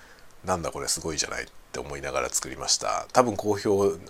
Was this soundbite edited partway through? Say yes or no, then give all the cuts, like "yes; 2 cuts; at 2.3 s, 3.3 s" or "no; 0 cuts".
no; 0 cuts